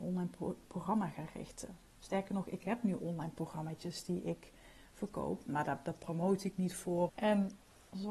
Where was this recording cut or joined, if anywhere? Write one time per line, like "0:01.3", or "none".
0:07.1